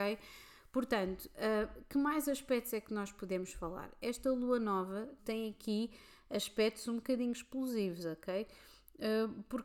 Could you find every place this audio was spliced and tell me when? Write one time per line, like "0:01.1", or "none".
0:05.2